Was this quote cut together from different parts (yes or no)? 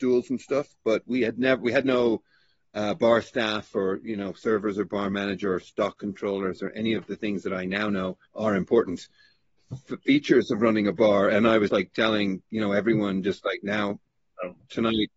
yes